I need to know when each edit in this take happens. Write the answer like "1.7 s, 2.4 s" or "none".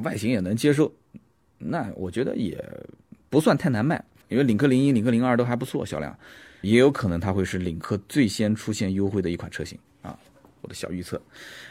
4.2 s, 6.6 s